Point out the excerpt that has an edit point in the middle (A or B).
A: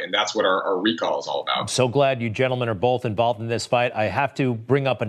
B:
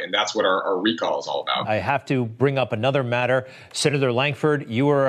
B